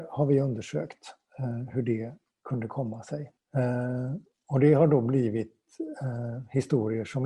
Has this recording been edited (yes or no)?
yes